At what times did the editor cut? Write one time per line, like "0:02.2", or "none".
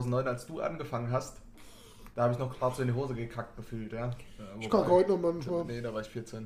0:02.1